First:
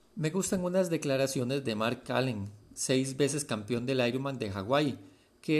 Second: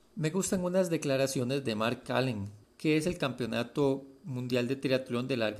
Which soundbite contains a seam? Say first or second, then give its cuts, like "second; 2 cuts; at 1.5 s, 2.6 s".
second; 1 cut; at 2.6 s